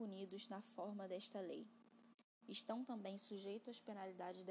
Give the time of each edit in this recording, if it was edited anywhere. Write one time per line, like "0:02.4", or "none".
0:02.4